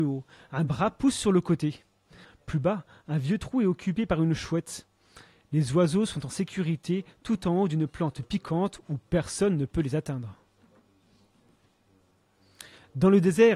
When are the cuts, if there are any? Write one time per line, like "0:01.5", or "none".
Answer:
0:02.2